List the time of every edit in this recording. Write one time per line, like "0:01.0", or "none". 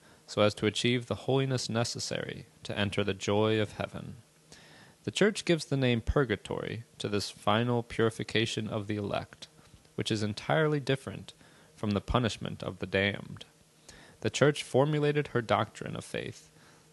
none